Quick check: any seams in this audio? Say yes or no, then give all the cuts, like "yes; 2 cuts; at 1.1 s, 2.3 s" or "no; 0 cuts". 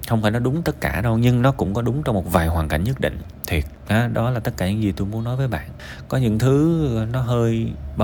no; 0 cuts